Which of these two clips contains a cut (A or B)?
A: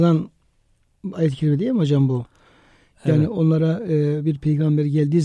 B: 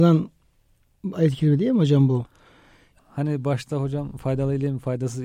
B